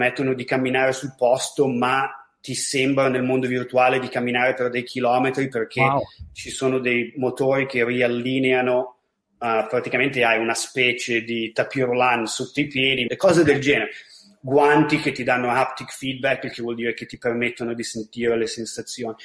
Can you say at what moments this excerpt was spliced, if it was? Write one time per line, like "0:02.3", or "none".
0:13.1